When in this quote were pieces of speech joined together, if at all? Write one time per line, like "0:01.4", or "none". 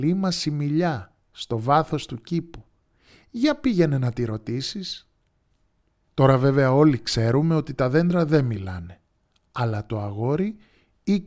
none